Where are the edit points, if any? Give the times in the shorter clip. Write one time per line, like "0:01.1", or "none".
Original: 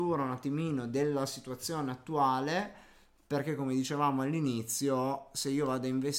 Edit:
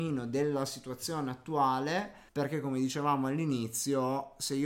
0:02.3